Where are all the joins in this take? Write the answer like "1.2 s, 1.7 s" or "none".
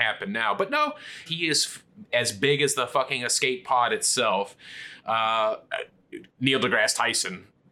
1.3 s, 5.7 s